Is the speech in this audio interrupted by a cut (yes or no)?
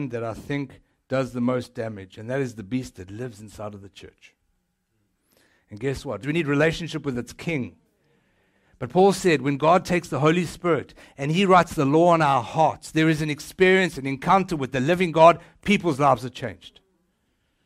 yes